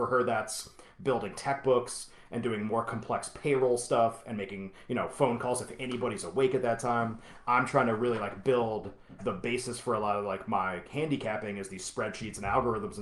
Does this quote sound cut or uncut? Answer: cut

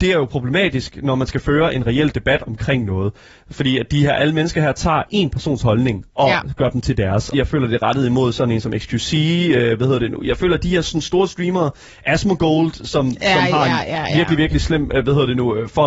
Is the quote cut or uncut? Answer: cut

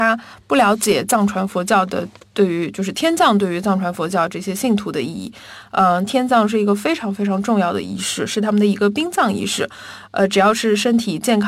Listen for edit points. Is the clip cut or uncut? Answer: cut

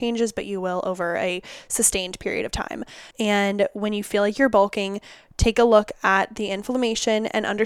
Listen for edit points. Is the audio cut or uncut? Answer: cut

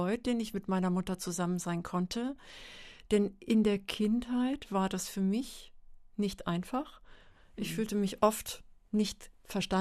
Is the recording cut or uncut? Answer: uncut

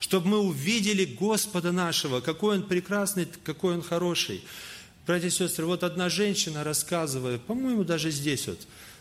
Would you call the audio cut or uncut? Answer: uncut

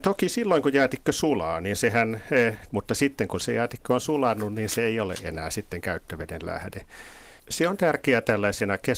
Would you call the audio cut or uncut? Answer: cut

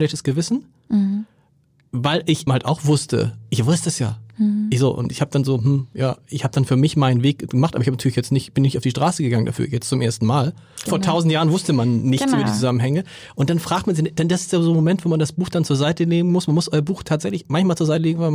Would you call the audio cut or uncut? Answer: cut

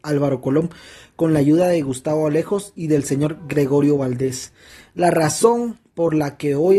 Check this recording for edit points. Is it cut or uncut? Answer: uncut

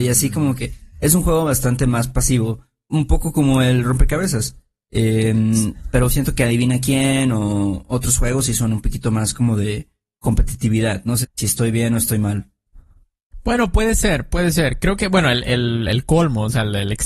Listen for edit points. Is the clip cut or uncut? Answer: cut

